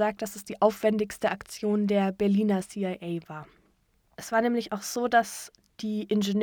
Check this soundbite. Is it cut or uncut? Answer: cut